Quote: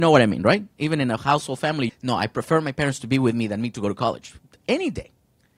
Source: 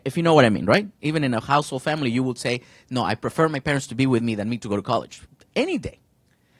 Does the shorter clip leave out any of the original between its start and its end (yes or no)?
yes